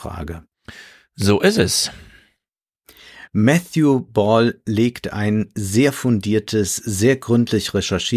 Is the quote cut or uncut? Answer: uncut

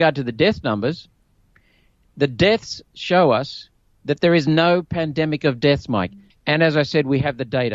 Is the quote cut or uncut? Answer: cut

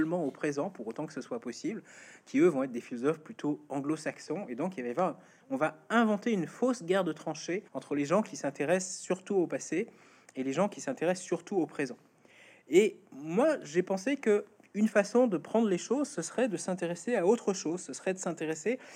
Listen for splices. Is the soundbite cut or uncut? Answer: cut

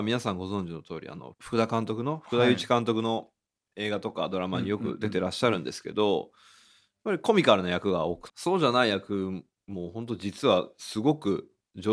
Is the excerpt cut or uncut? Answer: cut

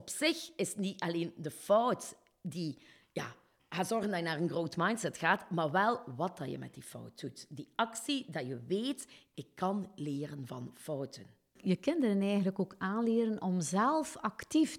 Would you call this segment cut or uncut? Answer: uncut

